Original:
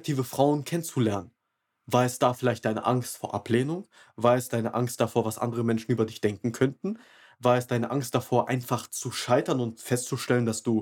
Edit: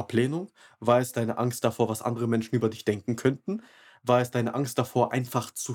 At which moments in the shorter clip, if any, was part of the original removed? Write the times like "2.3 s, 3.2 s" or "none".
none